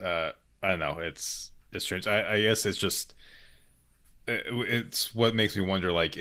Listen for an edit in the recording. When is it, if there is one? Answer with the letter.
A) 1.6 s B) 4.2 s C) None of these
A